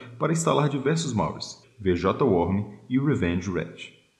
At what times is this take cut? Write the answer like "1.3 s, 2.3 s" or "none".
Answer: 1.6 s